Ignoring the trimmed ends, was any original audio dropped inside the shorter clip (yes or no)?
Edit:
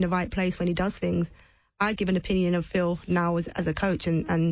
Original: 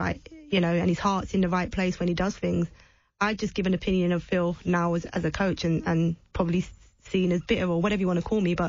yes